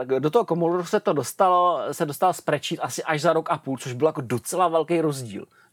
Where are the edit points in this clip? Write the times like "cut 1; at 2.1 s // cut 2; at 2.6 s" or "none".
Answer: none